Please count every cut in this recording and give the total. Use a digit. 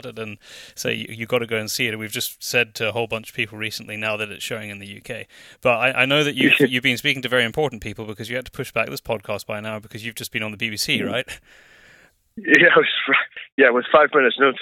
0